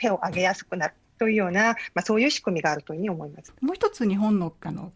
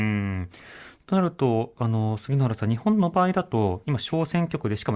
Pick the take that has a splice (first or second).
first